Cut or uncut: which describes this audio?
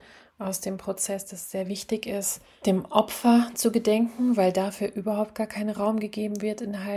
uncut